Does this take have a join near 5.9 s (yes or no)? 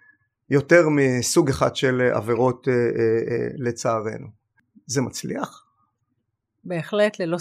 no